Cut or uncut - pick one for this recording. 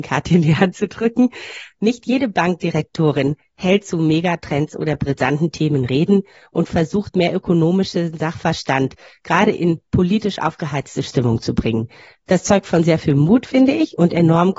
uncut